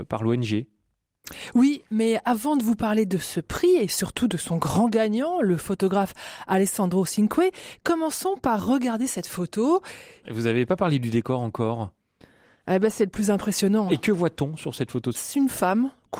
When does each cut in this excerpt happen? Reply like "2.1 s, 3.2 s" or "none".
10.2 s, 13.9 s, 15.1 s